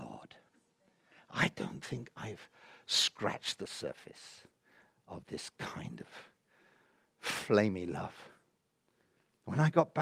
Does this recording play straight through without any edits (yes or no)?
yes